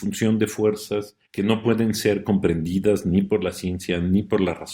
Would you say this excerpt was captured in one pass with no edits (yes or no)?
yes